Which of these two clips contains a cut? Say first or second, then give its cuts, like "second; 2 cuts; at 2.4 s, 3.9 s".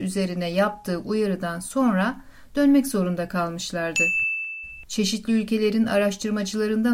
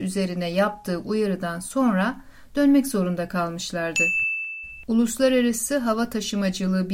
first; 1 cut; at 4.8 s